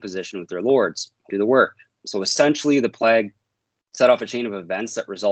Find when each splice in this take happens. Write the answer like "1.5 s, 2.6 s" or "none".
1.3 s